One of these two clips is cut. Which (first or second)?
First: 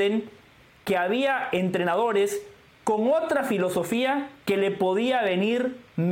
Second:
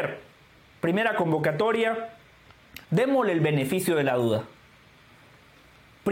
second